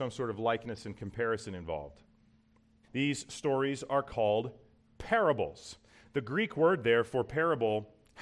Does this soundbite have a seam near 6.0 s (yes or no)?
yes